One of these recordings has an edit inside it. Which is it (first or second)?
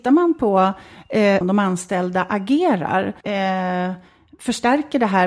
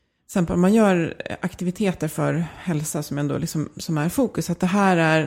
first